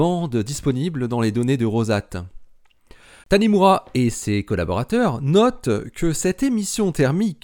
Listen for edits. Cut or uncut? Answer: cut